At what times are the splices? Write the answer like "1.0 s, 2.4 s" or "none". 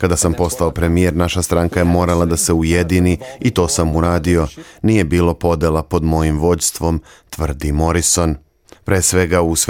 8.8 s